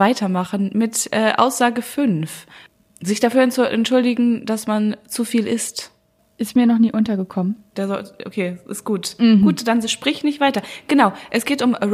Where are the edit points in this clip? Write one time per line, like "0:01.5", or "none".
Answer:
0:07.7